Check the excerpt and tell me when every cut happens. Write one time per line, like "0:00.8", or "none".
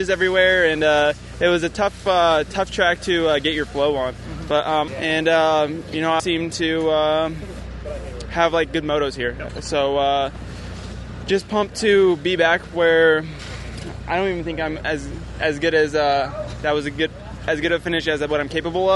0:04.9
0:06.2